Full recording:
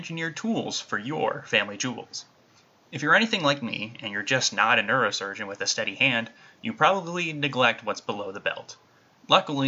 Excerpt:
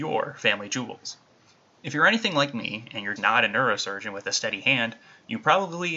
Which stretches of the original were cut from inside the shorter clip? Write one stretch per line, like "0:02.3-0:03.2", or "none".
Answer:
0:04.2-0:04.5